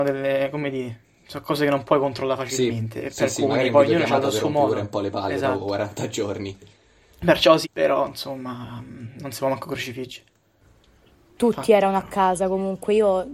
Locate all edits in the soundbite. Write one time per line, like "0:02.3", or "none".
0:07.6
0:11.4